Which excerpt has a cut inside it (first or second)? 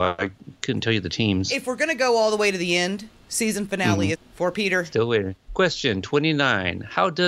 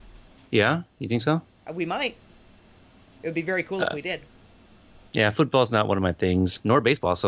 first